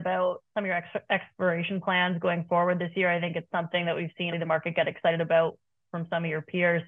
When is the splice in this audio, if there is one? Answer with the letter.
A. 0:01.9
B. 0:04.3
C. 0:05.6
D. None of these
B